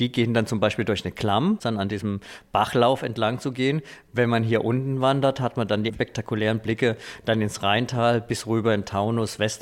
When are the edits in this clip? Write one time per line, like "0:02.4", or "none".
0:01.6
0:05.9